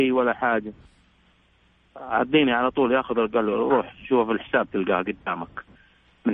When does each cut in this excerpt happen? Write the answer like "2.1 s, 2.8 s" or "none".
none

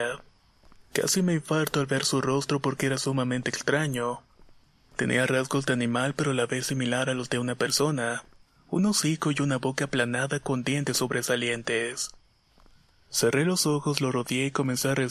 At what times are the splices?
none

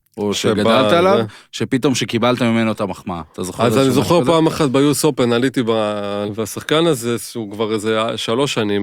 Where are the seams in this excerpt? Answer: 6.3 s

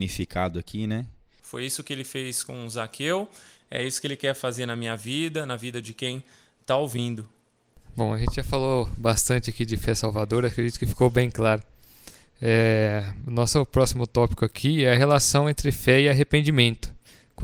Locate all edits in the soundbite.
1.4 s

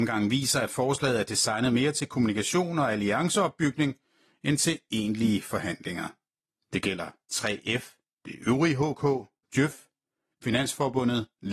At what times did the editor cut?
6.6 s, 8.2 s, 9.4 s

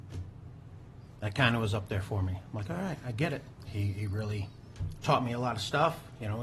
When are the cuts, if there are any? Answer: 3.6 s

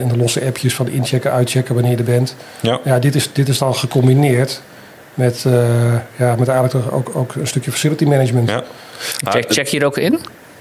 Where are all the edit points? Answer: none

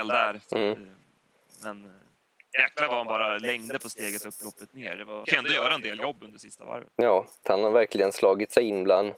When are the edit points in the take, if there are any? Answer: 5.2 s, 7.4 s

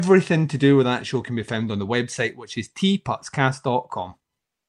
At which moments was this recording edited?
none

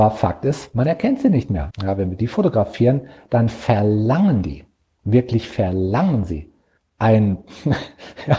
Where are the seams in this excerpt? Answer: 1.7 s, 6.8 s

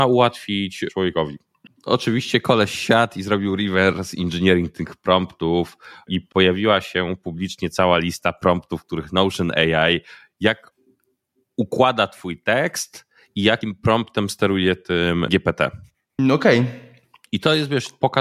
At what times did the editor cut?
1.7 s

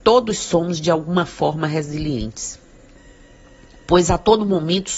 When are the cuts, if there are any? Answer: none

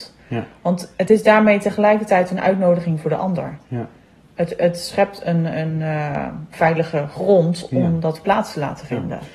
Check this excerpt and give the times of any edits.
6.5 s

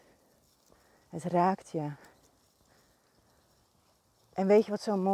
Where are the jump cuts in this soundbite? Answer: 1.0 s

